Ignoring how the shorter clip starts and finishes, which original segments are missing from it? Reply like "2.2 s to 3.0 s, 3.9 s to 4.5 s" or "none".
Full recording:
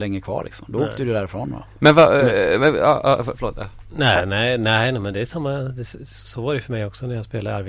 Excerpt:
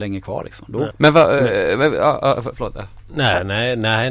0.9 s to 1.7 s